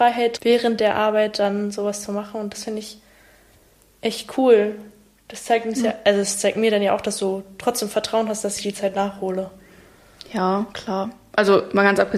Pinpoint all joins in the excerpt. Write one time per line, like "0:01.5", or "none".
none